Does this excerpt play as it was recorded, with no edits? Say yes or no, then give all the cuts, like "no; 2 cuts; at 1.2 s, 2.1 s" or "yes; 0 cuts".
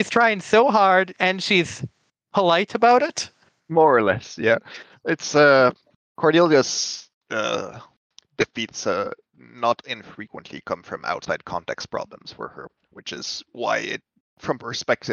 no; 2 cuts; at 1.1 s, 3.6 s